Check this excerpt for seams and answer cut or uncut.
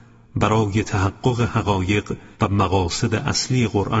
cut